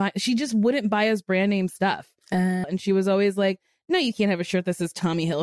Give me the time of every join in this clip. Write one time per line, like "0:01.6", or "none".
0:02.6

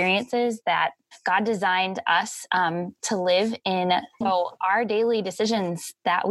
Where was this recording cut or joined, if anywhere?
0:04.2

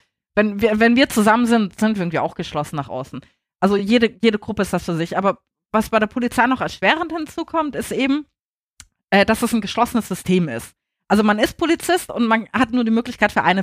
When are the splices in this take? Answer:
none

